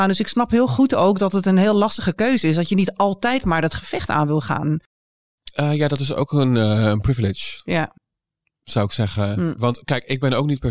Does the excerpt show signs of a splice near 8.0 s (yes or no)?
no